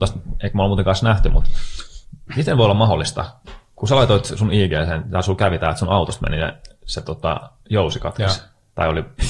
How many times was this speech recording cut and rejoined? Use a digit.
0